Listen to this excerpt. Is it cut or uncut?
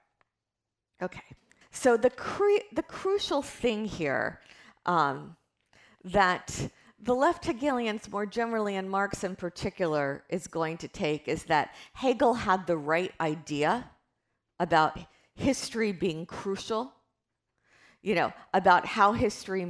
cut